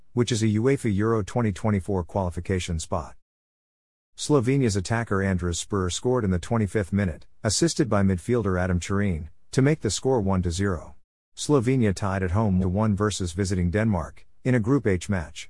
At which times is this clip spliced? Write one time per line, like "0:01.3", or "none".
0:04.1
0:11.2
0:12.6